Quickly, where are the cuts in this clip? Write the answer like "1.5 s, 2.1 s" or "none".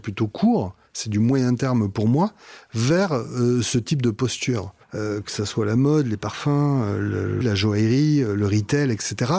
4.8 s, 7.4 s